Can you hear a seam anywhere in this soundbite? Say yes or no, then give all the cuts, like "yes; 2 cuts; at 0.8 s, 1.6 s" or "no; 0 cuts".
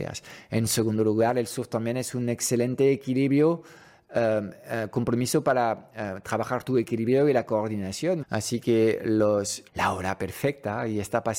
yes; 2 cuts; at 8.2 s, 9.7 s